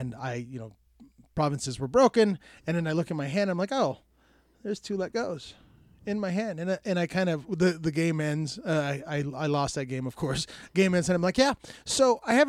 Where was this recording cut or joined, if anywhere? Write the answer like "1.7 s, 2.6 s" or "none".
none